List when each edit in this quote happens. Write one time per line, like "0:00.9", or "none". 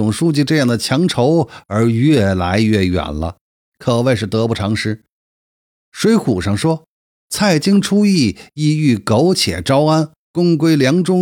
none